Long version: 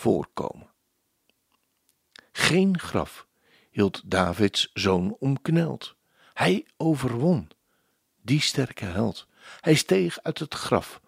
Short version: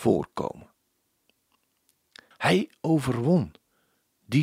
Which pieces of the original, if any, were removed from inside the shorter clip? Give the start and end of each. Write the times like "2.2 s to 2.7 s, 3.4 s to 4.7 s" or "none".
2.3 s to 6.3 s

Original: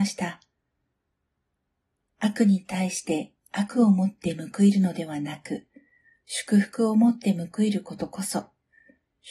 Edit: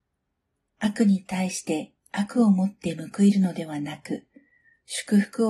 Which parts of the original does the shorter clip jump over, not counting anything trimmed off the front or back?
none

